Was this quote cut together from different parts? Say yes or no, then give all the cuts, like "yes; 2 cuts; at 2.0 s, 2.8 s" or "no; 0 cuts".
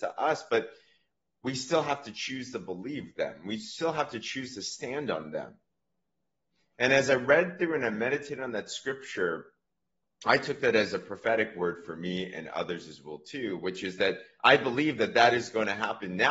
no; 0 cuts